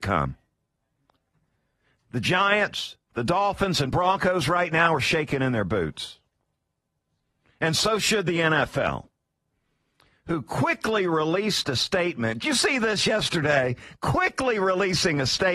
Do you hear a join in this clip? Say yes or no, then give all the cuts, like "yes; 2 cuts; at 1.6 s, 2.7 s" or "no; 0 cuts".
no; 0 cuts